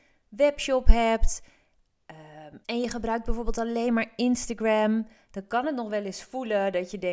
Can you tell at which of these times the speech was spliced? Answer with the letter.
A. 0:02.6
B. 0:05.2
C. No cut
A